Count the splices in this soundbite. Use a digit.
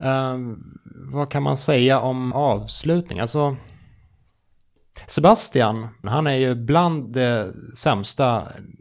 2